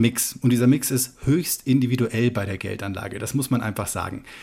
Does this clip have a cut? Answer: no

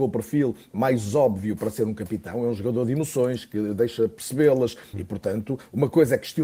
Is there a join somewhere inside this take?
yes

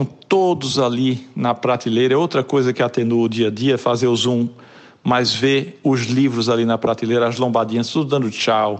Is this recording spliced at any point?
no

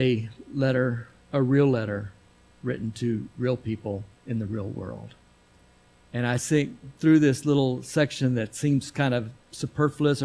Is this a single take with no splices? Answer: no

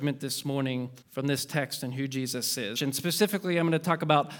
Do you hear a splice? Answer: yes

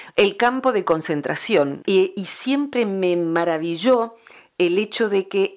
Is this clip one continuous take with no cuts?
no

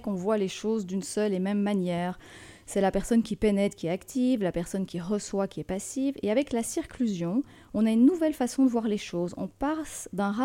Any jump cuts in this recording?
no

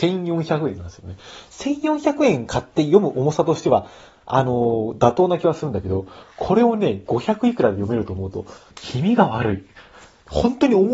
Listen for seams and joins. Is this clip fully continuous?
no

